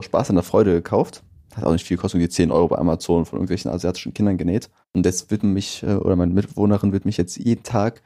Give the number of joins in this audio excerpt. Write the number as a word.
one